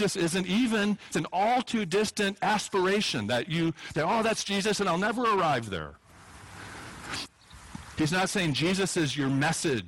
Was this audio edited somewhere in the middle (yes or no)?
yes